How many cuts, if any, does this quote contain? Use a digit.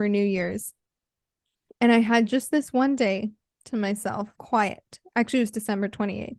1